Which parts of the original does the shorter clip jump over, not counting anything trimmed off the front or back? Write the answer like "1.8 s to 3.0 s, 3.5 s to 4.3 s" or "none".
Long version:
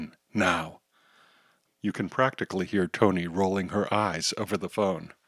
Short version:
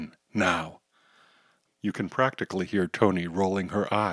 none